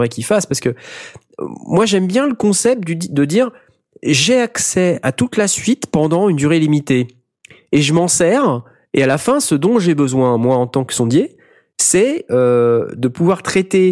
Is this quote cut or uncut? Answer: uncut